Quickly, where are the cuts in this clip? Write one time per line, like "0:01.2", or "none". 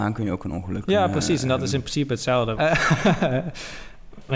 0:02.6